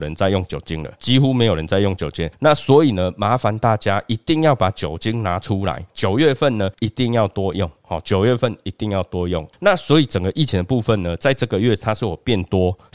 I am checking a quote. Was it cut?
no; 0 cuts

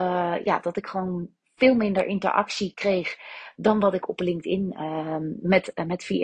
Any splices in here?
no; 0 cuts

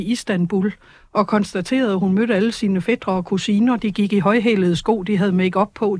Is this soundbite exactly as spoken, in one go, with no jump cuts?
yes; 0 cuts

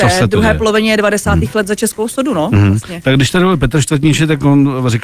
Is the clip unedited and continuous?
yes; 0 cuts

